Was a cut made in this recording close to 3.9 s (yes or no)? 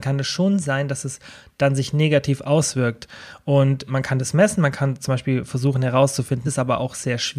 yes